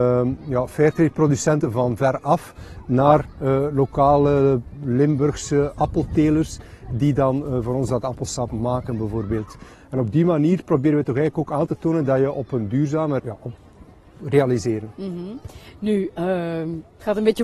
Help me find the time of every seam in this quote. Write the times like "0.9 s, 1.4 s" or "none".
9.7 s, 13.2 s